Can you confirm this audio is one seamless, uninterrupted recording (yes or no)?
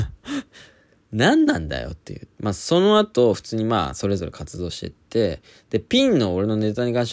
no